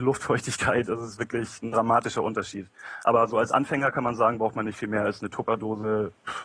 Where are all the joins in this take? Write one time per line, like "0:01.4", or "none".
none